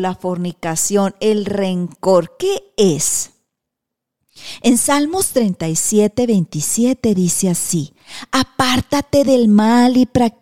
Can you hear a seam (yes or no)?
no